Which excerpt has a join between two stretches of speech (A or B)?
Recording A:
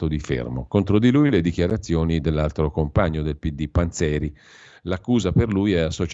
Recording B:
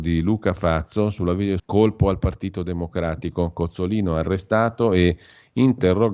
B